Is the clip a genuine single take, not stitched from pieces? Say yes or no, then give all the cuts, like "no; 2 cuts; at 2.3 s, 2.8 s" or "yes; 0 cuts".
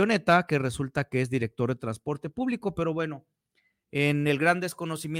yes; 0 cuts